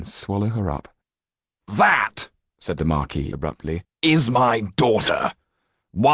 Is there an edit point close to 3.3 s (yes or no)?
no